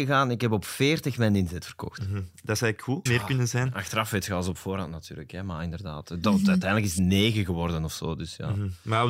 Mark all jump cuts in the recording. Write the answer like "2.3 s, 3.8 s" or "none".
3.1 s